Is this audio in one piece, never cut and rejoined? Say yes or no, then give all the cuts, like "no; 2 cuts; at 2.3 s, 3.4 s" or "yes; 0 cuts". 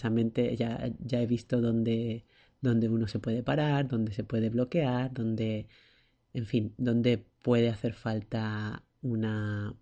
yes; 0 cuts